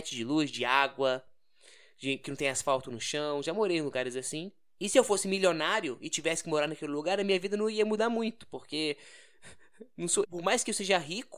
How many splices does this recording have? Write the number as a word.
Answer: one